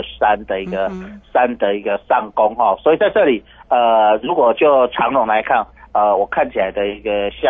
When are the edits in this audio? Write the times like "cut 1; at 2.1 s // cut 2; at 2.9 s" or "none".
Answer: none